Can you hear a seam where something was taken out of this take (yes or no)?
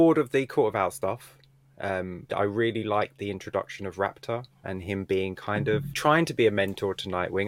yes